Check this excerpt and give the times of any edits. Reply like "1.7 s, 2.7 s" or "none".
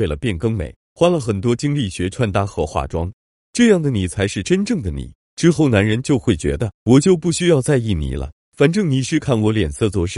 5.2 s, 6.8 s